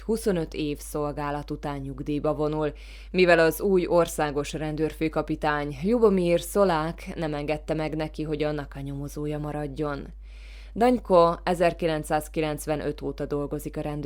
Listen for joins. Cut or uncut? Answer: uncut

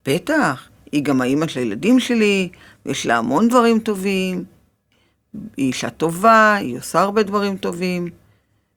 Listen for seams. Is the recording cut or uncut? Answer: uncut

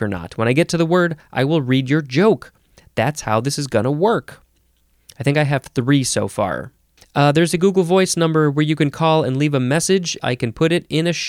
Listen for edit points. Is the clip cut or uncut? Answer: cut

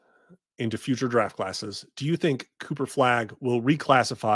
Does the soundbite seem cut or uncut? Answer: uncut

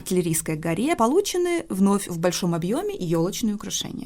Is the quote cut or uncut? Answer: cut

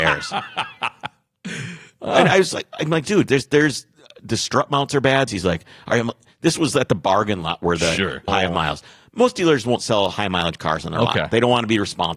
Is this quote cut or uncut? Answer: cut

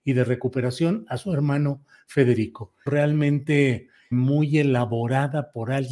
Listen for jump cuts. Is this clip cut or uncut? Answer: cut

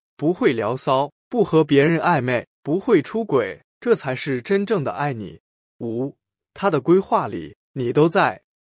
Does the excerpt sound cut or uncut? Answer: uncut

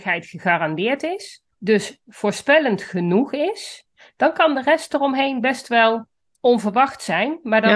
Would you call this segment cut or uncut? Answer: cut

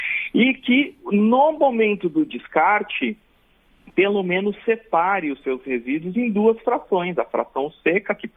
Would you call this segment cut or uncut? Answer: uncut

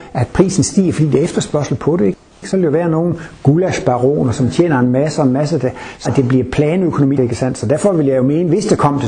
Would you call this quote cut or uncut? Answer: cut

